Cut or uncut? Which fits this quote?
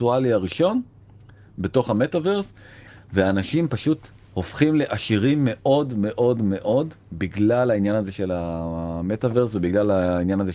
uncut